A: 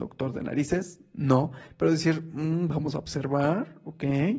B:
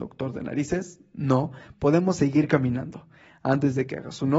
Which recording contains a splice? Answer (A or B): B